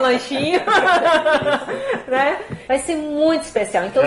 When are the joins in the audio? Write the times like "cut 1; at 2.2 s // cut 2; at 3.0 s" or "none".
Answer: cut 1; at 2.6 s